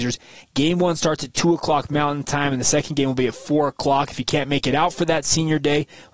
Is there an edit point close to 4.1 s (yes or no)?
no